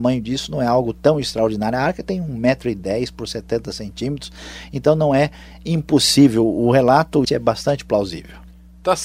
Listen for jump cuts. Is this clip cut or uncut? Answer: cut